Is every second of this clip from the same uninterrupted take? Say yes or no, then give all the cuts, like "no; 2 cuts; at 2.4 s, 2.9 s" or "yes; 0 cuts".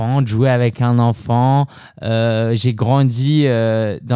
yes; 0 cuts